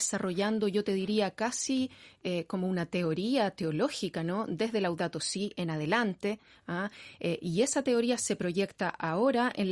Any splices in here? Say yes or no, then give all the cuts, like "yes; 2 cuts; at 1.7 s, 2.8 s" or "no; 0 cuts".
no; 0 cuts